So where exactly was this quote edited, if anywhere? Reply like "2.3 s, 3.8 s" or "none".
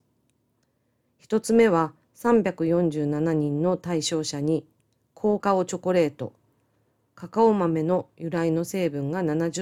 5.4 s